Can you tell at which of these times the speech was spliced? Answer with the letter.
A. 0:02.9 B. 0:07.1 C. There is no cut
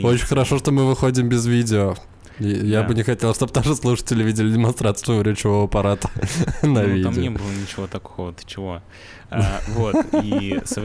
C